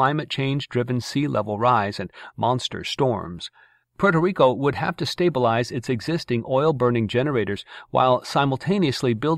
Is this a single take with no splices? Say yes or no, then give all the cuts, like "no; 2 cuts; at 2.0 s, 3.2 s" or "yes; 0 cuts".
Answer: no; 1 cut; at 3.8 s